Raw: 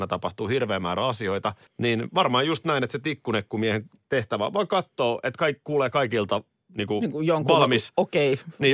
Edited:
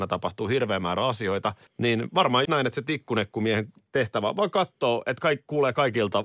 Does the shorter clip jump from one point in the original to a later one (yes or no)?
yes